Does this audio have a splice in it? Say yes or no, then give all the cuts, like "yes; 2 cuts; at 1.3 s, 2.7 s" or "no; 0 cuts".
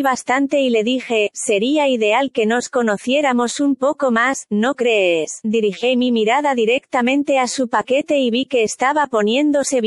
yes; 1 cut; at 1.3 s